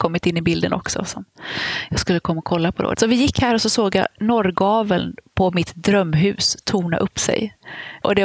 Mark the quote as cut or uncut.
uncut